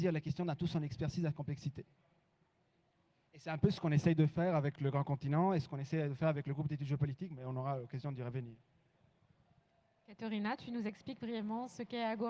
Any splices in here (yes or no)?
no